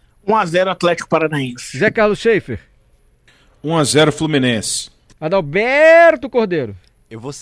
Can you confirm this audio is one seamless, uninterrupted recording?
yes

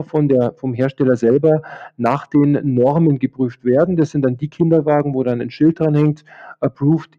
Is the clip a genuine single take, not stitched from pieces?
yes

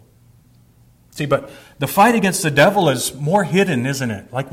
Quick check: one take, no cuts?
no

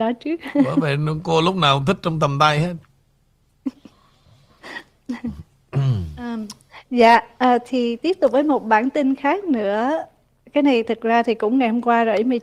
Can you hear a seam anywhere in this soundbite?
no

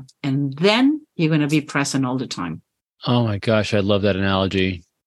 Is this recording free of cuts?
yes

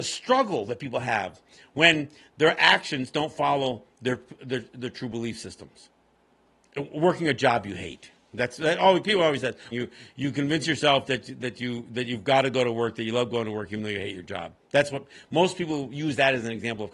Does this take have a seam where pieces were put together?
yes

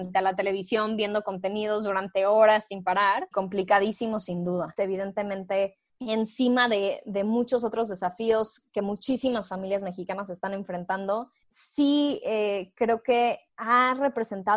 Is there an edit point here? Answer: yes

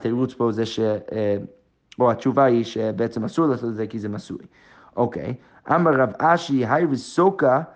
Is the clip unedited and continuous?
yes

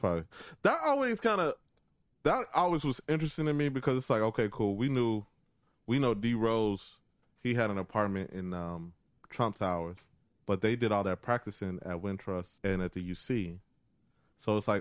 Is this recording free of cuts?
no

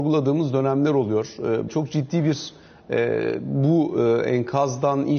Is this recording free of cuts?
no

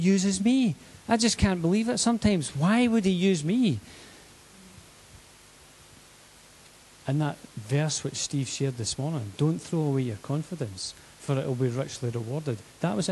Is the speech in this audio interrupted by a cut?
no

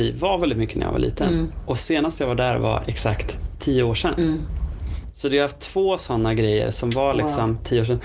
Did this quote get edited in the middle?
no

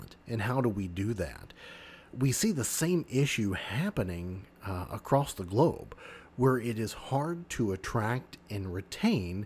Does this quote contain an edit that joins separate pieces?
yes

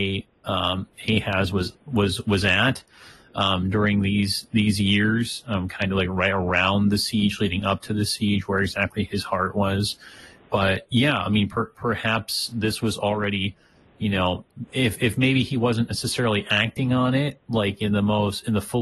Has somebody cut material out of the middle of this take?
no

